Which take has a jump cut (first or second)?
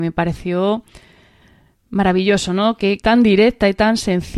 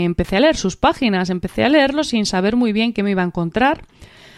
first